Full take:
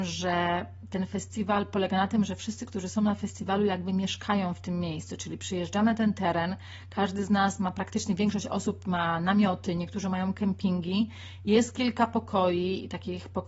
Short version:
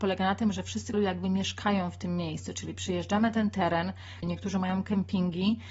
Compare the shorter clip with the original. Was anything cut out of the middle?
yes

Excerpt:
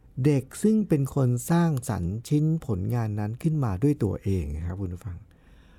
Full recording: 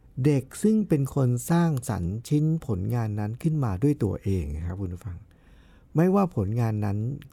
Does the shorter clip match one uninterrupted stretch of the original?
yes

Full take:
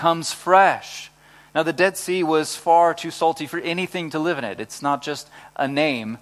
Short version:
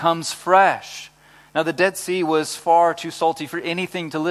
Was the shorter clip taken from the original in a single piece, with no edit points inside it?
yes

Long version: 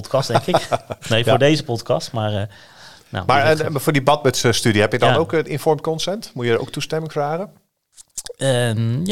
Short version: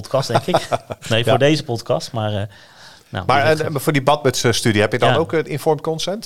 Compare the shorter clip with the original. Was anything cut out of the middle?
no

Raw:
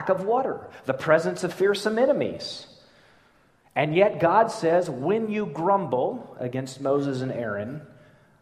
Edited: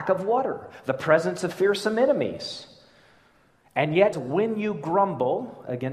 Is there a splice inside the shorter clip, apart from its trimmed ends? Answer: yes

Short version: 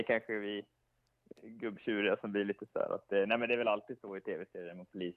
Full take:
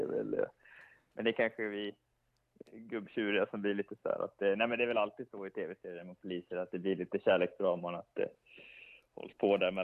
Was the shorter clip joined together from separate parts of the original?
no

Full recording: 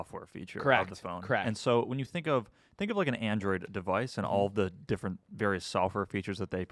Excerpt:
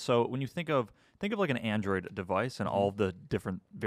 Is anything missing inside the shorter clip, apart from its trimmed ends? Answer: no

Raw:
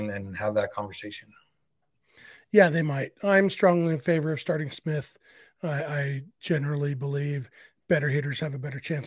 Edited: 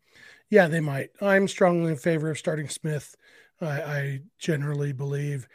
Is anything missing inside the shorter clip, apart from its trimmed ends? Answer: no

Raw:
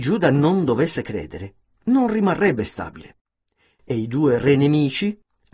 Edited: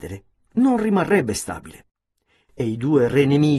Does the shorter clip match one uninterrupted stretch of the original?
yes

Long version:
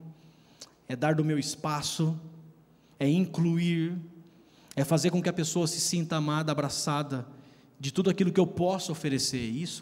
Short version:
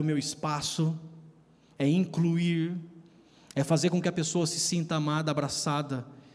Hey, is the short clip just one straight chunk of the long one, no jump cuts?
yes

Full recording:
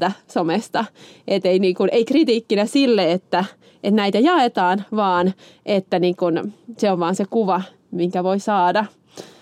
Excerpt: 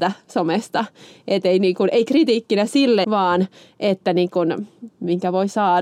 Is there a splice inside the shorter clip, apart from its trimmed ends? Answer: yes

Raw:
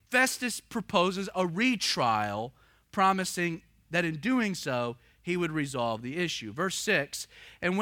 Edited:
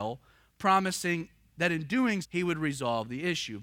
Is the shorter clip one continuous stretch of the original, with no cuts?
no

